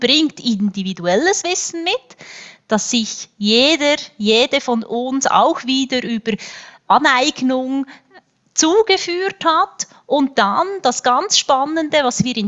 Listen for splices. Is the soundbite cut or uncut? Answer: uncut